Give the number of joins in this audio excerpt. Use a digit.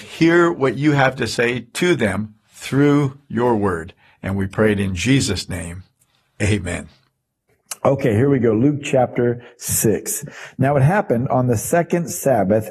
0